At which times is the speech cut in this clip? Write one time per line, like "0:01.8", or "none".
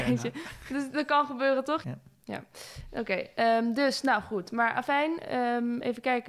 0:01.8